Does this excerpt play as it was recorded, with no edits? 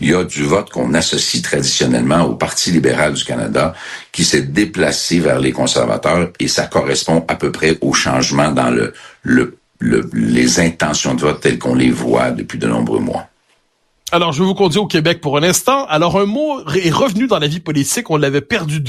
yes; 0 cuts

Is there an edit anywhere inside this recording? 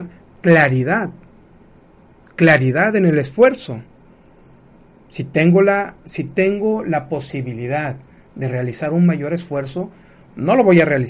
no; 0 cuts

